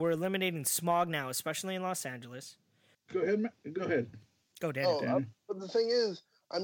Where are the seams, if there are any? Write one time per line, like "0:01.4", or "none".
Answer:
0:02.9